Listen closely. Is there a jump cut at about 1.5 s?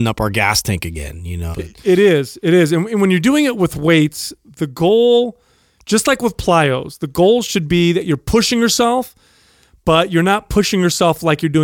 yes; 1 cut; at 1.5 s

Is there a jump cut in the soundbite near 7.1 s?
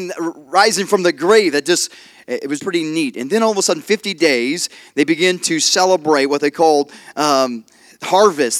no; 1 cut; at 2.6 s

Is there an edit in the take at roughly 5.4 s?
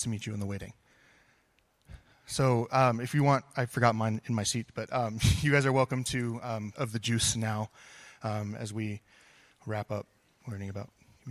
no; 1 cut; at 6.7 s

